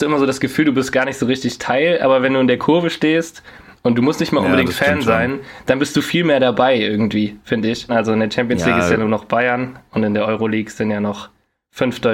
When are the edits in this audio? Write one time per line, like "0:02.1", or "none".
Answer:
0:07.9